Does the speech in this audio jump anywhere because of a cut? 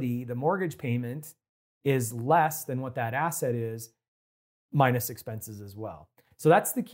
no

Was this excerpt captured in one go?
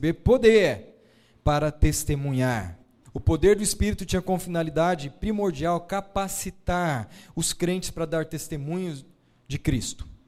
no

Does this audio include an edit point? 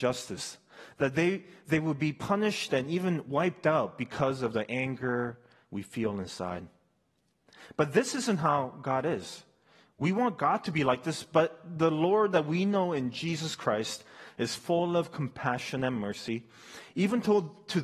no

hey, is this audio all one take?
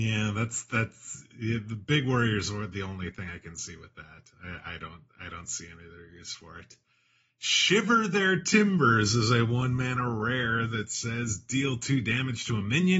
yes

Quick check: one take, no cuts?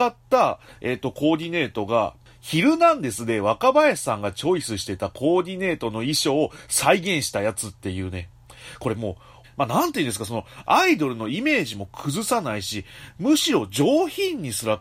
no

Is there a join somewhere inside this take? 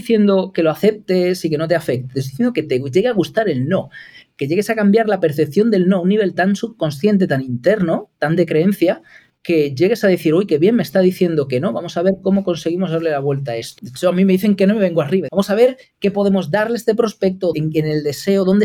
yes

